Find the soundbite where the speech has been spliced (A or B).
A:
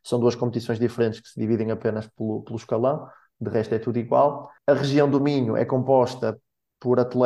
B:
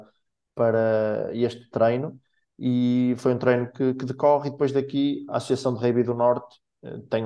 A